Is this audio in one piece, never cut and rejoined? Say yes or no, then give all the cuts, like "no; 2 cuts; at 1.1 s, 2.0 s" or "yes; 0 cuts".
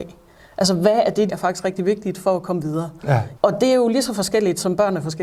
no; 2 cuts; at 1.3 s, 3.4 s